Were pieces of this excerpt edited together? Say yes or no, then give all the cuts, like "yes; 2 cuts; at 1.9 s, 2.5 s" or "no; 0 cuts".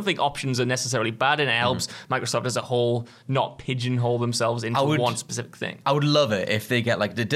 no; 0 cuts